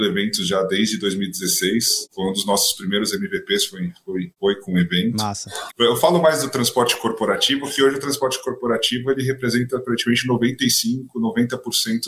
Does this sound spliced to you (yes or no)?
yes